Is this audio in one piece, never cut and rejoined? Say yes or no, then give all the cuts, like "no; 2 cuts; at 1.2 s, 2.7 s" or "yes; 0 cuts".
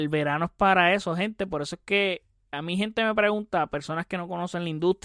yes; 0 cuts